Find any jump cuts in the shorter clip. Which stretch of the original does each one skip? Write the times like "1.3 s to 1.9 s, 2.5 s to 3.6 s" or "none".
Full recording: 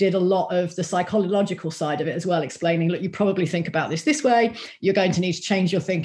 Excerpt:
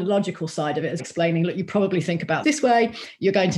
2.2 s to 2.4 s, 3.9 s to 4.0 s